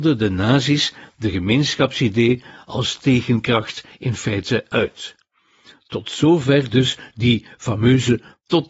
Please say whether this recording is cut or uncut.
uncut